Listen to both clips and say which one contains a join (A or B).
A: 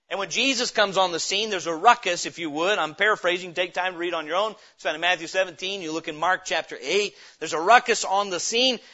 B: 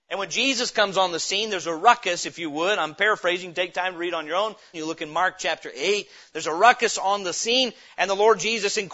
B